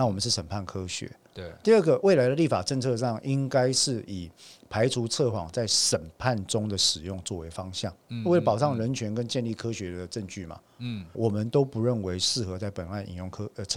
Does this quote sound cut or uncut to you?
cut